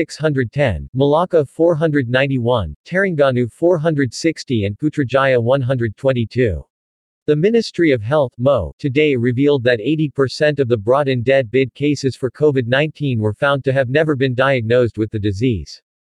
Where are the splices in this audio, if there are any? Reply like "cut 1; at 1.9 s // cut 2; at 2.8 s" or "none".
cut 1; at 7.2 s